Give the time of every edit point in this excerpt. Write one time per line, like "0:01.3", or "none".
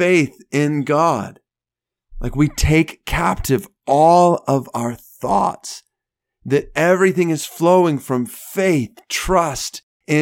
none